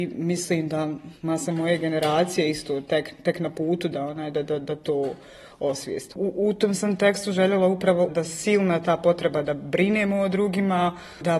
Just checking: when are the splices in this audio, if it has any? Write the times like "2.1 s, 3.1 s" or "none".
6.1 s, 8.1 s